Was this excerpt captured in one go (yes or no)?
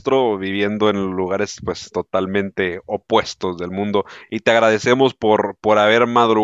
yes